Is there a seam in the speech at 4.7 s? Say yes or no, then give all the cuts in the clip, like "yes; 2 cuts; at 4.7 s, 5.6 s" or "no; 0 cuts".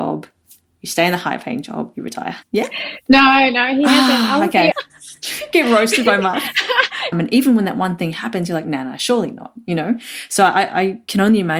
yes; 3 cuts; at 2.4 s, 4.7 s, 7.1 s